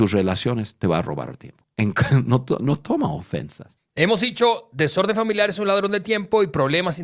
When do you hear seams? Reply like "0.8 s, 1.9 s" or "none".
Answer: 1.6 s, 3.8 s